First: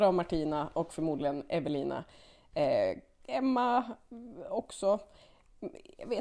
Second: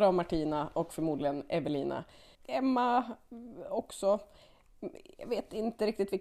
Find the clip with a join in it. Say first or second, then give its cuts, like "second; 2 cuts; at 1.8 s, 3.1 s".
second; 1 cut; at 2.4 s